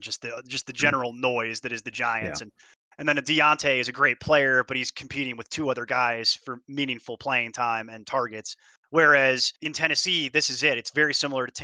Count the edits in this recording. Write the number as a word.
one